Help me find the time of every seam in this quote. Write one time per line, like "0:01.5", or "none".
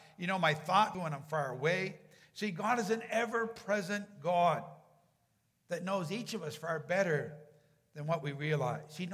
0:00.9